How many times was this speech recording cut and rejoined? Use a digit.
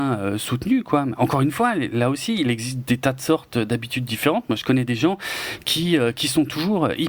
0